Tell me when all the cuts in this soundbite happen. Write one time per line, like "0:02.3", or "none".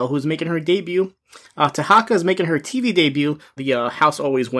0:01.4
0:03.6